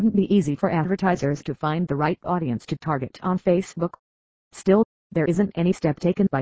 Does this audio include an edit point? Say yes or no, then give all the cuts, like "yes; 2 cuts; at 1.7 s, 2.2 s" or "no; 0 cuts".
no; 0 cuts